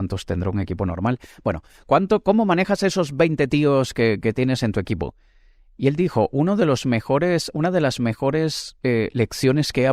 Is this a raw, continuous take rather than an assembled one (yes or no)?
yes